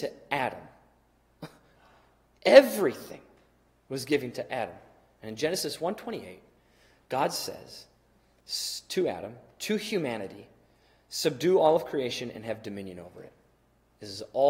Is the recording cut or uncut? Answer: uncut